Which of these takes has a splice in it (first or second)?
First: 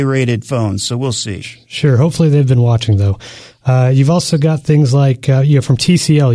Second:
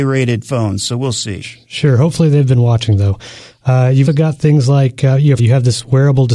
second